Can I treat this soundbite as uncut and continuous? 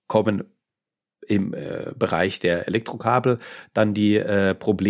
yes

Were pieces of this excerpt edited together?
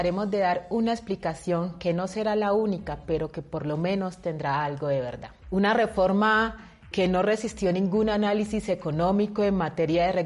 yes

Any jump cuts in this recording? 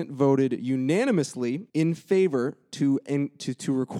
yes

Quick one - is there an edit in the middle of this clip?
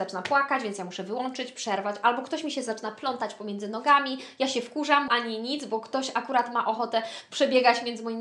yes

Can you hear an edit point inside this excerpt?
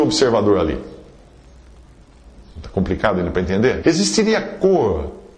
yes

